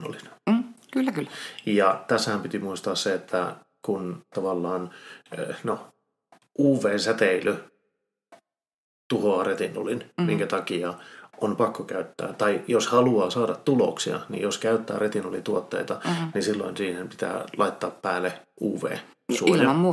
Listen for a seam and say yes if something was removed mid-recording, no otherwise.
no